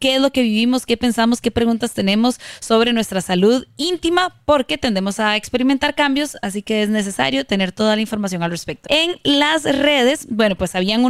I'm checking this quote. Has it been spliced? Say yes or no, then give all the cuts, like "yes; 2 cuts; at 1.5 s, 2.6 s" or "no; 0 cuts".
yes; 1 cut; at 8.8 s